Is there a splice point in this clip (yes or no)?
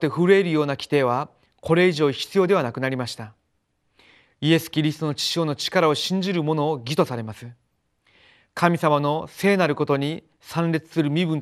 no